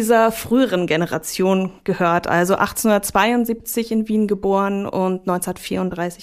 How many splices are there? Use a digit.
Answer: 0